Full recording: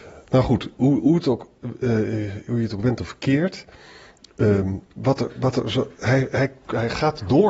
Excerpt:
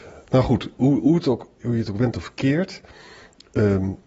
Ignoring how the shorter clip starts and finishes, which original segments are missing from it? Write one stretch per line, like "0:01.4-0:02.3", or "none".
0:01.6-0:02.4